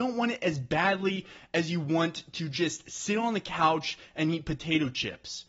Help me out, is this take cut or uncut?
uncut